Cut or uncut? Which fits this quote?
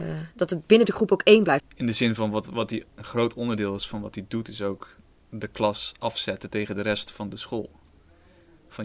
cut